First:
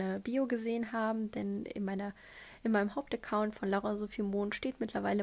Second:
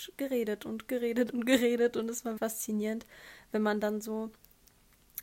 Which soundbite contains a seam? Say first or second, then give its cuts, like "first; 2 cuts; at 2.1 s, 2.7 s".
second; 1 cut; at 2.4 s